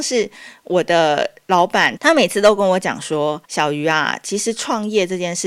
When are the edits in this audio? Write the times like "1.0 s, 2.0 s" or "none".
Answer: 2.0 s, 3.4 s